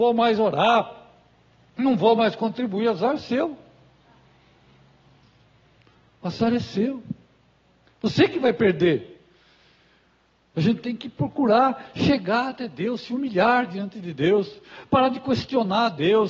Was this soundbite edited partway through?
no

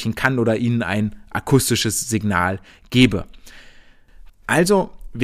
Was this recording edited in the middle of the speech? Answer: yes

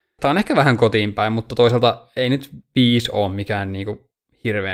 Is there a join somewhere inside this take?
no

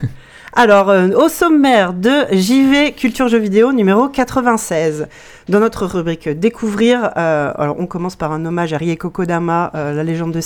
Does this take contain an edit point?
no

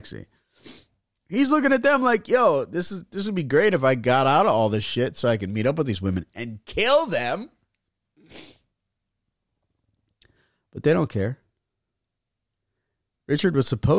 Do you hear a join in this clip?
no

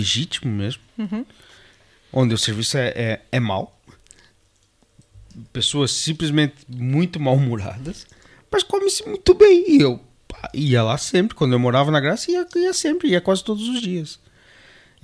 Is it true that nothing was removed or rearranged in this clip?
yes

